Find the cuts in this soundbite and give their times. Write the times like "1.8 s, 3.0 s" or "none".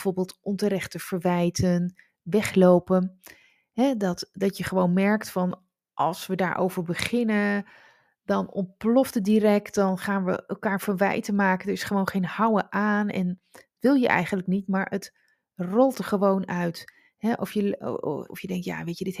18.3 s